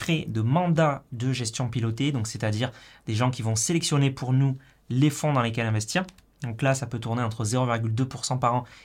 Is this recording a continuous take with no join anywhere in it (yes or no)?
yes